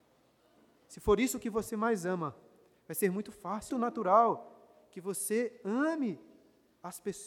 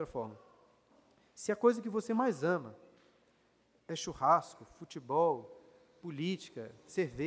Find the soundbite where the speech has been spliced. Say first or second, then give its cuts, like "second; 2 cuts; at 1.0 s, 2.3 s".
first; 1 cut; at 3.7 s